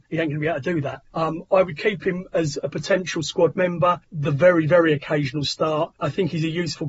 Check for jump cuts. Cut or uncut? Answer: uncut